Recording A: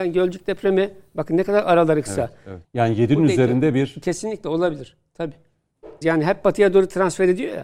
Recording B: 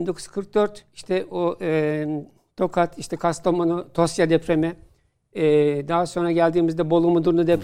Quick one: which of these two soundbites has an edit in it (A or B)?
A